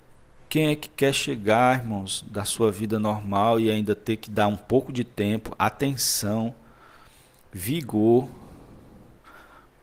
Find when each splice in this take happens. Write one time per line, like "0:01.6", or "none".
none

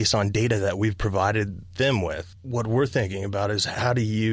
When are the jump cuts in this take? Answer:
none

